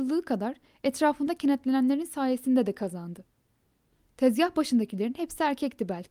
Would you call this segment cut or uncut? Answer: uncut